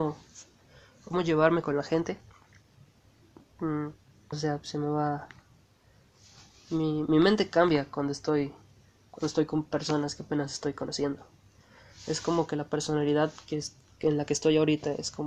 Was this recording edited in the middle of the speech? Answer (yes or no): yes